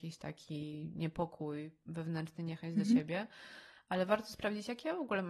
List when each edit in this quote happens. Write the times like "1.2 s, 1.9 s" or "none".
none